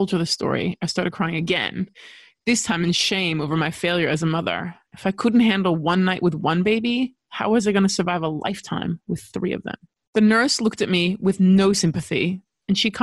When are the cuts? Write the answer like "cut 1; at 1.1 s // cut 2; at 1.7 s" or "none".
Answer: none